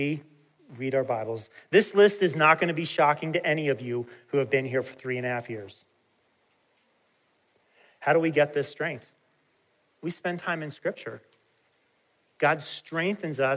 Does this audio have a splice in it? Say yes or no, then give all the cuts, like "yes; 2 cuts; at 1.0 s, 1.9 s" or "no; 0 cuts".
no; 0 cuts